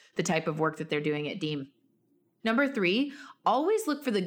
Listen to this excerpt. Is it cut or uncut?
uncut